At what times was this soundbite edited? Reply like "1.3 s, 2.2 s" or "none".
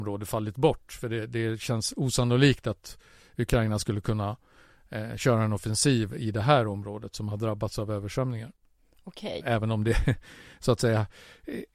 9.4 s

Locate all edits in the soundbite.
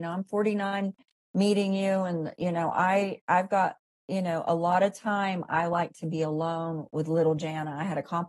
none

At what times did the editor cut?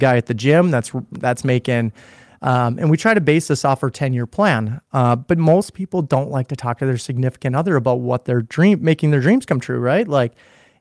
2.4 s

